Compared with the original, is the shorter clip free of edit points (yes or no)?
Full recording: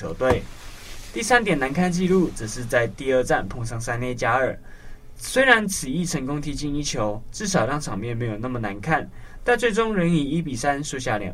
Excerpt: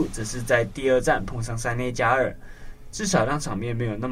no